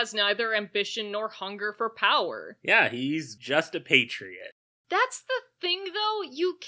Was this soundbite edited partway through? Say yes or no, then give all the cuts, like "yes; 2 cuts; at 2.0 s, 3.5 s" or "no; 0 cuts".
no; 0 cuts